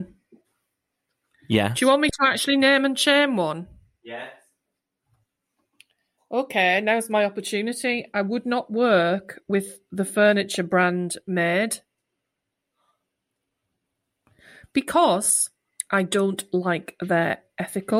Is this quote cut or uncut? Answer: uncut